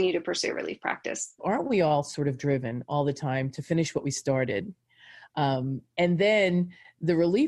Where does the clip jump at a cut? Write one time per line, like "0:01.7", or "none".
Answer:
0:01.4